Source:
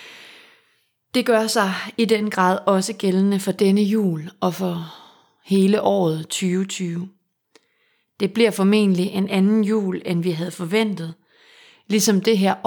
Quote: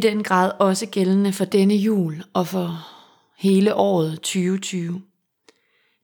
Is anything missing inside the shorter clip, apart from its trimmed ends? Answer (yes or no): no